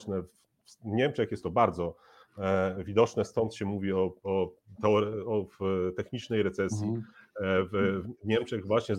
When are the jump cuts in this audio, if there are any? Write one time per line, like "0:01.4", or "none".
none